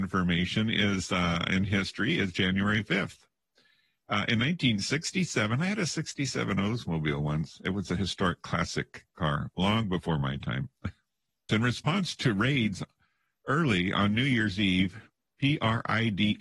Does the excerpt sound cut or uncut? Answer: cut